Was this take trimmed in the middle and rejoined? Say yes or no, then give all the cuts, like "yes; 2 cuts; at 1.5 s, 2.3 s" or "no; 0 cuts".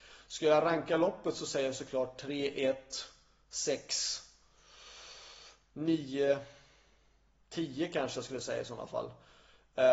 yes; 1 cut; at 7.3 s